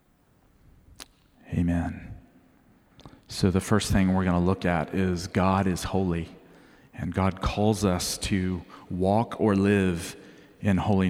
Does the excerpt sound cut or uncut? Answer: uncut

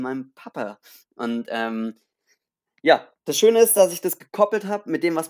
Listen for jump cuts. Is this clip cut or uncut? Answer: uncut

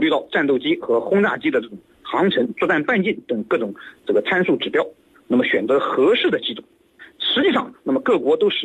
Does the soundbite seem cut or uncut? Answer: cut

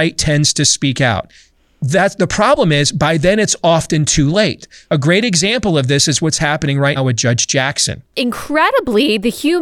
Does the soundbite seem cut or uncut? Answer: cut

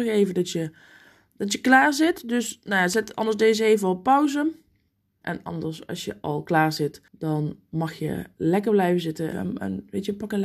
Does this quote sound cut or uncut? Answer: cut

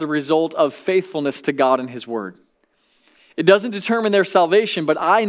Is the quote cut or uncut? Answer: uncut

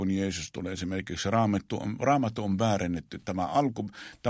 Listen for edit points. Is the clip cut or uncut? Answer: uncut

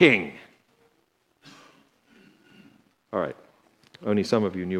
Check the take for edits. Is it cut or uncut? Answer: cut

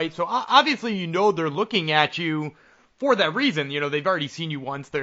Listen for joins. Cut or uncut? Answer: uncut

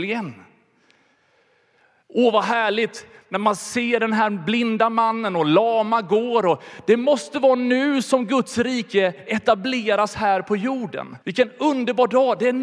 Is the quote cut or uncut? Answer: cut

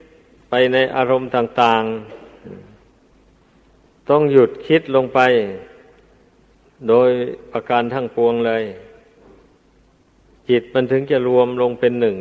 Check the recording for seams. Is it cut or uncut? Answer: uncut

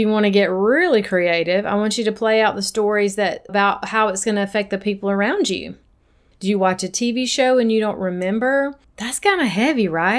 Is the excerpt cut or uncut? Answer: cut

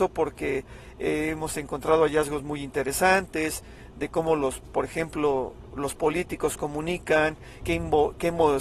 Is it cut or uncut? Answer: cut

